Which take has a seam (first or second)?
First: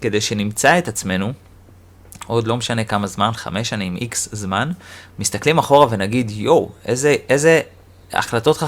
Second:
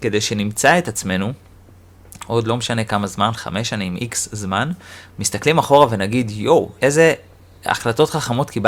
second